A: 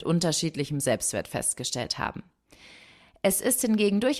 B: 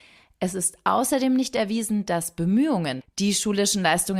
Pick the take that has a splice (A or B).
B